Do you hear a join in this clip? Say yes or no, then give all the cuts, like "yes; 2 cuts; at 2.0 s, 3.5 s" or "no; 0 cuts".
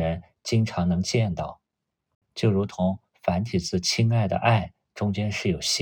no; 0 cuts